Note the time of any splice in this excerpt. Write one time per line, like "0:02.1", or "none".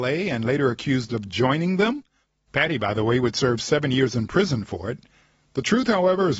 0:05.5